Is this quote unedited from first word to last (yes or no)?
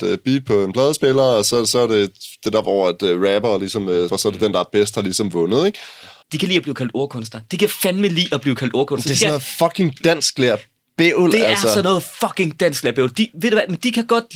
no